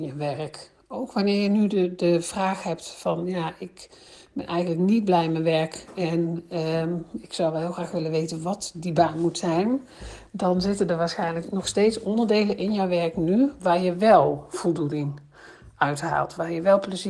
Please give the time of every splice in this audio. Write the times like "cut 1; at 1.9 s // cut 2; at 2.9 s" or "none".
none